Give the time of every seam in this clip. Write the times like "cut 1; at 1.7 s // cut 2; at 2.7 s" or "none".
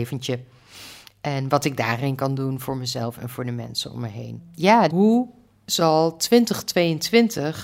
cut 1; at 4.9 s